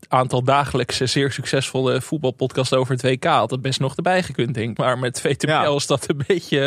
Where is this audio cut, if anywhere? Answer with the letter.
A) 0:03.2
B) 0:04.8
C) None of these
B